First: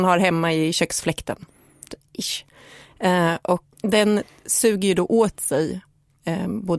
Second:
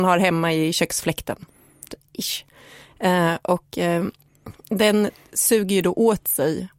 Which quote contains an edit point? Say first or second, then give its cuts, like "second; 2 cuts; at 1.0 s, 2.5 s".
first; 1 cut; at 3.7 s